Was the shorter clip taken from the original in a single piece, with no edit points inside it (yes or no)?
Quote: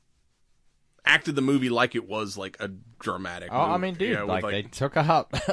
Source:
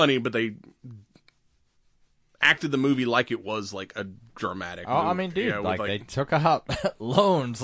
yes